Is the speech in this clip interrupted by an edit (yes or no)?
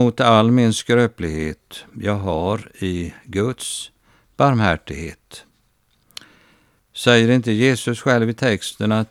yes